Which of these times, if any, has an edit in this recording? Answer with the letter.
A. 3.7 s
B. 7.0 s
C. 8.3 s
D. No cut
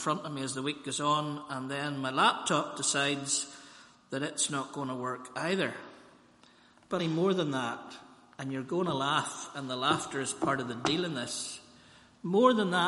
B